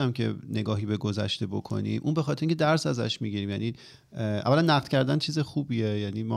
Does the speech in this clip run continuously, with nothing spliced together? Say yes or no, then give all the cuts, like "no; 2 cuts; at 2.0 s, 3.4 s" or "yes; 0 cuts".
yes; 0 cuts